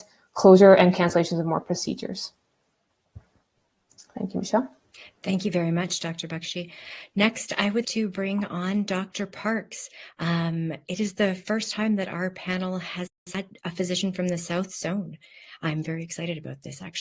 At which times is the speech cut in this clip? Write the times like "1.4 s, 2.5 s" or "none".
7.8 s